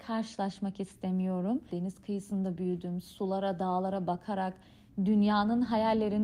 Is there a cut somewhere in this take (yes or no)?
yes